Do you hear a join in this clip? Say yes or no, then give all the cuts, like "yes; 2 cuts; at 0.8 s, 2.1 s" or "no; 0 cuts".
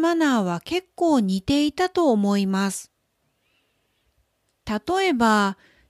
no; 0 cuts